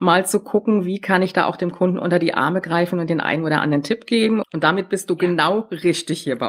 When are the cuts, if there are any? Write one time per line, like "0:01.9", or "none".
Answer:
0:04.4